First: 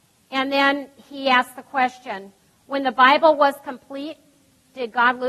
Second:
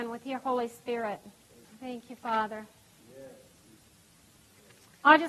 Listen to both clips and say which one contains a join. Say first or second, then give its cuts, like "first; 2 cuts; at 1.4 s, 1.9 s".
second; 1 cut; at 1.6 s